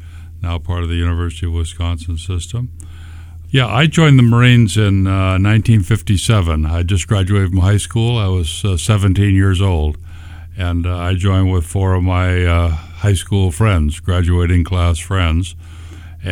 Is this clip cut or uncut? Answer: cut